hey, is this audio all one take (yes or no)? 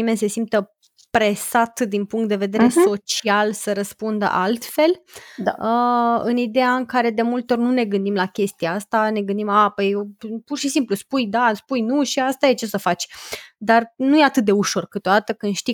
yes